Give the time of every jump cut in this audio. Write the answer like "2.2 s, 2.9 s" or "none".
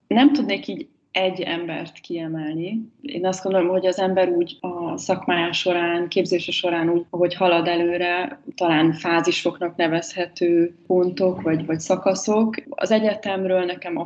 7.1 s, 8.5 s